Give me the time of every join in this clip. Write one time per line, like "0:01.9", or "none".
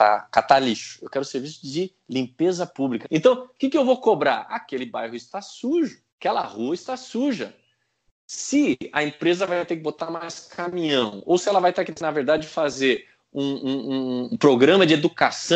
0:03.0
0:06.1
0:14.3

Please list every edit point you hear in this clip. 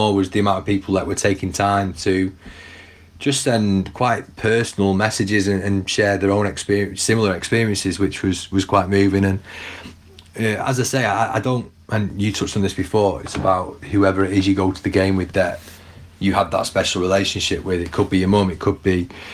0:13.2

